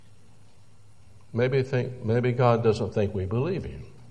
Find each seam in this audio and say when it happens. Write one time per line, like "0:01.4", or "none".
none